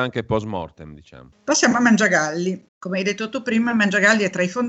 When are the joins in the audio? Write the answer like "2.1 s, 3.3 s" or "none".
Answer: 1.3 s, 2.7 s